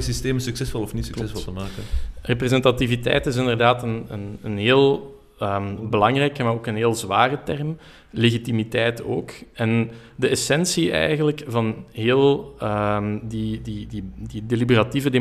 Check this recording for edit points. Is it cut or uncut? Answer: uncut